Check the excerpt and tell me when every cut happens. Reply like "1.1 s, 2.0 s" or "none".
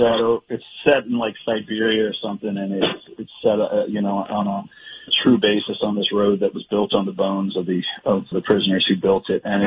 5.1 s, 8.3 s